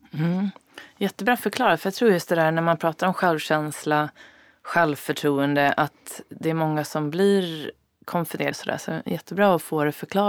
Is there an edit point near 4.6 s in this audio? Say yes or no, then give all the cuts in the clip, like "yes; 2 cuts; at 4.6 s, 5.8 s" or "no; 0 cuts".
no; 1 cut; at 8.5 s